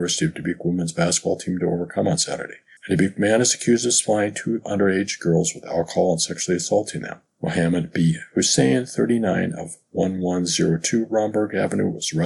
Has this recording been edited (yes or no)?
yes